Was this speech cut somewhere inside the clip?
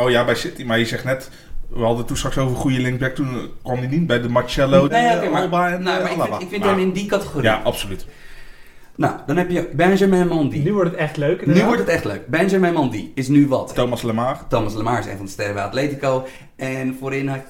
yes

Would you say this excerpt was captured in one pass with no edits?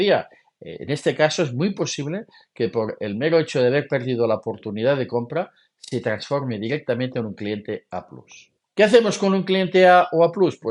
yes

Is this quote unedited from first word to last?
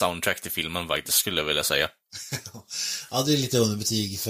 yes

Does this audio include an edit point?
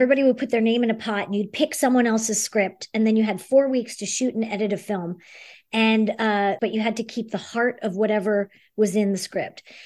yes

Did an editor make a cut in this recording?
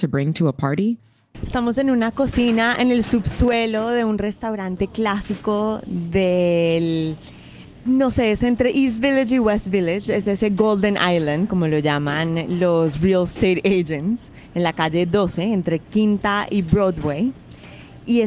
yes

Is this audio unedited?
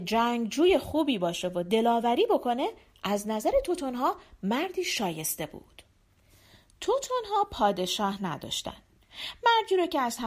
yes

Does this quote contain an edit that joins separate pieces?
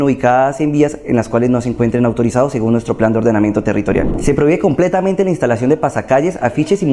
no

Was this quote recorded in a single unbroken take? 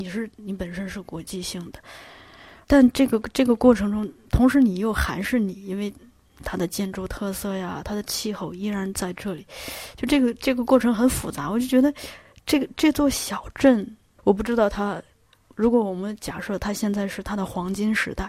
no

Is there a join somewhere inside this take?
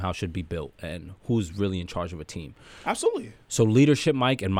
no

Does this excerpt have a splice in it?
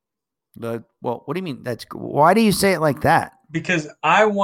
no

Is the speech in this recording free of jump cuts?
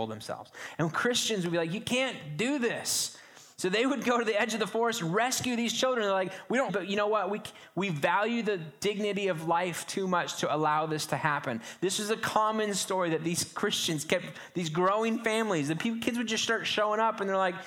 no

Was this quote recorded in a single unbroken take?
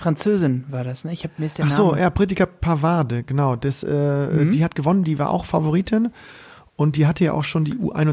yes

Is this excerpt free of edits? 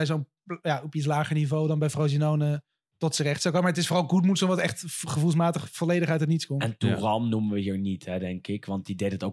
yes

